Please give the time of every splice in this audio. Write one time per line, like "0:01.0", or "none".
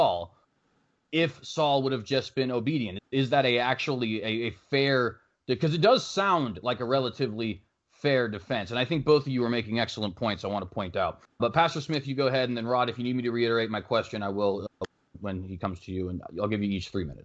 none